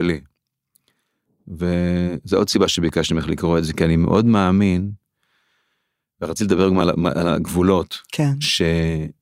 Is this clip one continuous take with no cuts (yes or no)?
yes